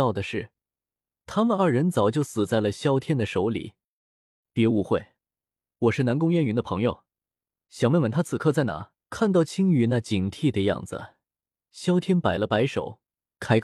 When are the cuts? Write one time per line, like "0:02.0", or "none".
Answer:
0:09.0